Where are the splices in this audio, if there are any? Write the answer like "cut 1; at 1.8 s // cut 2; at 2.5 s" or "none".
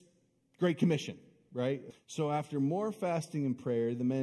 cut 1; at 1.9 s